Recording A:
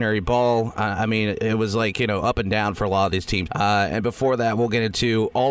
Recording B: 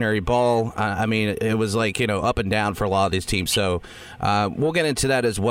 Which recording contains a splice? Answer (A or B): A